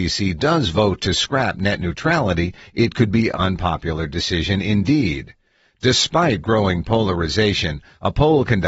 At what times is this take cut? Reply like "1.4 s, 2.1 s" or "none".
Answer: 3.3 s